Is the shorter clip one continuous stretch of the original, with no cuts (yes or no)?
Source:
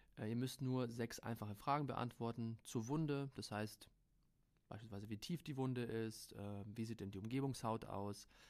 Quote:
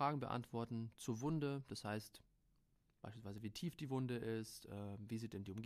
yes